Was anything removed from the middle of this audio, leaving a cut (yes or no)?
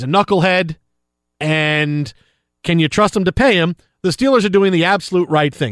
no